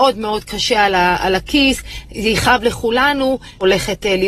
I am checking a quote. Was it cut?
no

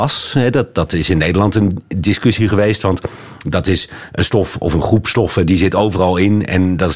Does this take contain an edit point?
no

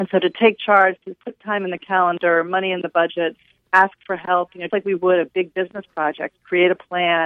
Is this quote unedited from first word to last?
no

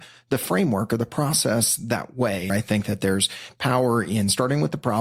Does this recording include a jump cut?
yes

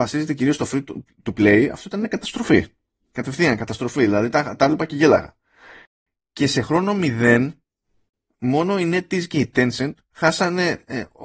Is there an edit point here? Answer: no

